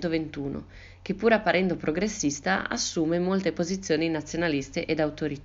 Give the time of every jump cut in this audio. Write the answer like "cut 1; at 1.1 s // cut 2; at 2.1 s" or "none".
none